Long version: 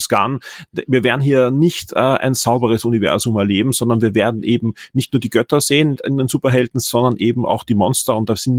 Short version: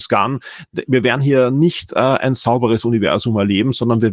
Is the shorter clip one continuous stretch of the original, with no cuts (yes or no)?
yes